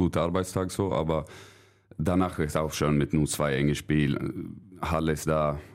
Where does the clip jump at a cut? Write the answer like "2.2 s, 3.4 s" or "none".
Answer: none